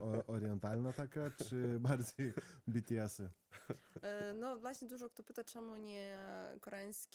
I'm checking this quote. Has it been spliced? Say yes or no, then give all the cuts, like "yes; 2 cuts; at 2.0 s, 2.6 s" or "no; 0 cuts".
no; 0 cuts